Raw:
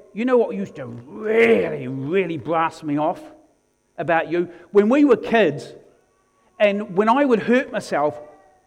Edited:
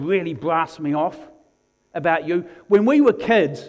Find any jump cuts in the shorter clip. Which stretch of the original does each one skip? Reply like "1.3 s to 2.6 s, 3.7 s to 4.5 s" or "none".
none